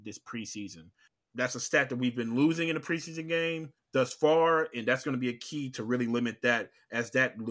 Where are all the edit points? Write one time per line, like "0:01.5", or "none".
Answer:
none